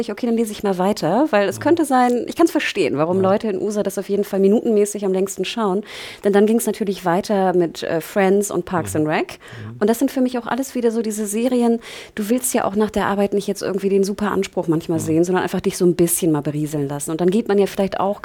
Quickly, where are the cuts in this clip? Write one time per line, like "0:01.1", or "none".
none